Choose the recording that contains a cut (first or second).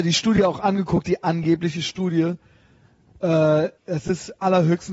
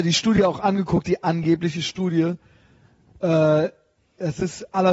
first